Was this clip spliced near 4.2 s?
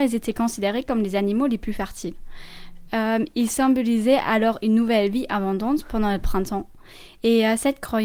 no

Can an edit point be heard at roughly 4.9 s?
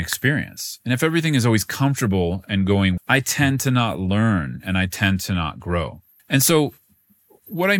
no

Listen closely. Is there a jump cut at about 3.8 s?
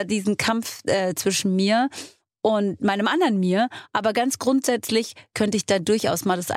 no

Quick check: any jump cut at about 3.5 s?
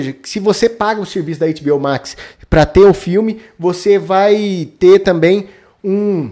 no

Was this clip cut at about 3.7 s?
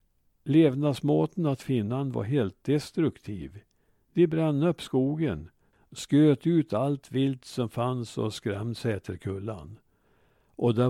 no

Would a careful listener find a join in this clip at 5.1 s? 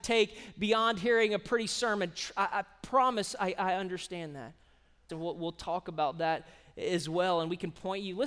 yes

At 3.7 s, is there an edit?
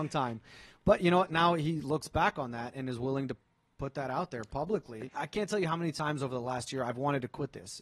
no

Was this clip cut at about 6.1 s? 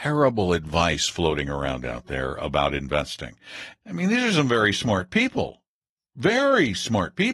no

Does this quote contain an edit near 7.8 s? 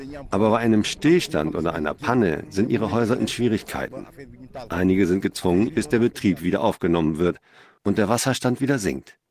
no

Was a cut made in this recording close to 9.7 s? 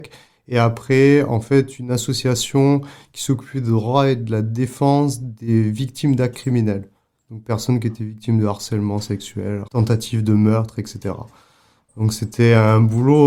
yes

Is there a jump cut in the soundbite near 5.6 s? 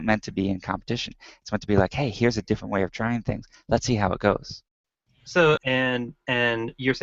yes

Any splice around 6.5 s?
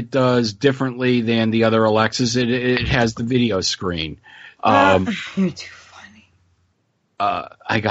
no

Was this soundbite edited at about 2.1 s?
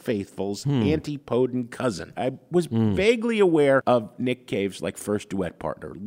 yes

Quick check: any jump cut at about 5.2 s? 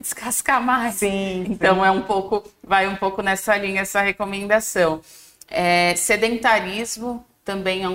no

